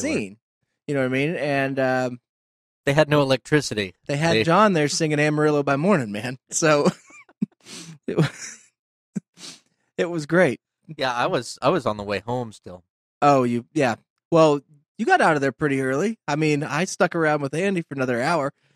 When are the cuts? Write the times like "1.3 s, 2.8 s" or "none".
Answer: none